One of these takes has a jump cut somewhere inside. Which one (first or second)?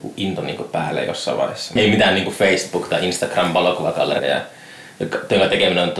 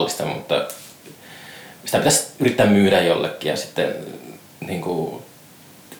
first